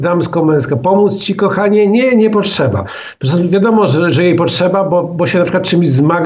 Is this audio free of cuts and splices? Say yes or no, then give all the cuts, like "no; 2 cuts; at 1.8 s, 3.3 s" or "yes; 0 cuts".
yes; 0 cuts